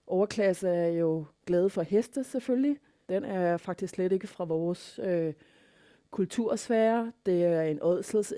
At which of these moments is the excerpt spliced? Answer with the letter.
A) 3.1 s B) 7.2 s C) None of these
A